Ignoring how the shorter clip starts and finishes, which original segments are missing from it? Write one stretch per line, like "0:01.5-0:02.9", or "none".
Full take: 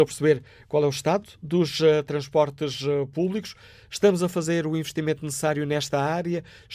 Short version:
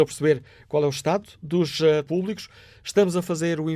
0:02.1-0:03.1